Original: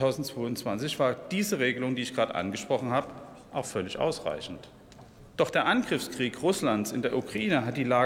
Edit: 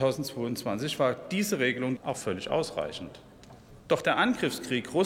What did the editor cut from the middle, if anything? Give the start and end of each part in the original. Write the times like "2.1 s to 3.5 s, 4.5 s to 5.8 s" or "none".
2.0 s to 3.4 s